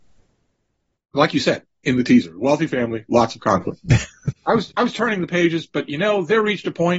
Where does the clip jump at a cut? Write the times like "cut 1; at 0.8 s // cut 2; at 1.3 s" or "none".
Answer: none